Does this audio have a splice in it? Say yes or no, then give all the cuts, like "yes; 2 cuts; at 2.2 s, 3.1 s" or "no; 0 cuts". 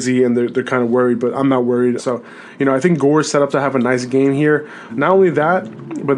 yes; 2 cuts; at 2.0 s, 4.9 s